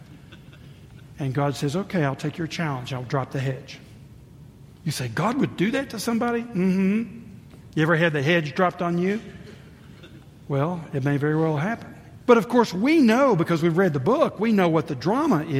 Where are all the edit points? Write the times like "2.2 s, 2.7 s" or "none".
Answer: 12.2 s